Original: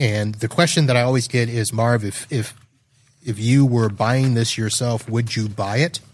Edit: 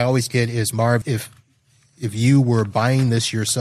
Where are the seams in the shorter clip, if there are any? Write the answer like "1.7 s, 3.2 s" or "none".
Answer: 1.0 s